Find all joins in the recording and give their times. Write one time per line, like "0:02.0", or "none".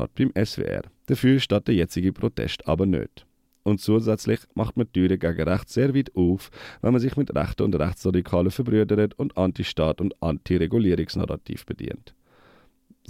0:00.9